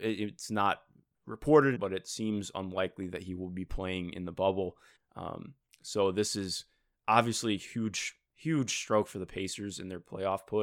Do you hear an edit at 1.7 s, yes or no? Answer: yes